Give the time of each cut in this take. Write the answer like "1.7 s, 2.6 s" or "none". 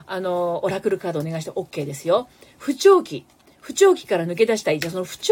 none